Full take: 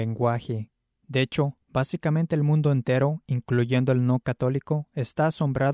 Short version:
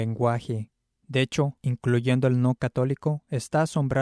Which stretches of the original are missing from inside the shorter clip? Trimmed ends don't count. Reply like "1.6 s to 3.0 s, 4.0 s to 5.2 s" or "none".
1.6 s to 3.2 s